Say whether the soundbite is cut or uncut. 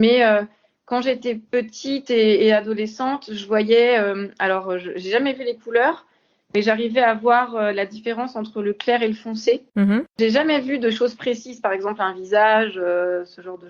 uncut